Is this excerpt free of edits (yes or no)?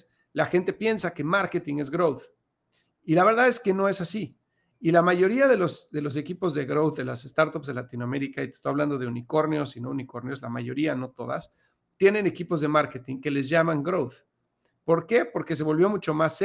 yes